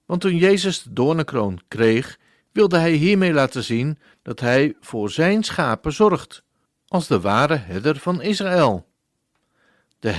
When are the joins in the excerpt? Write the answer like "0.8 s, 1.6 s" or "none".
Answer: none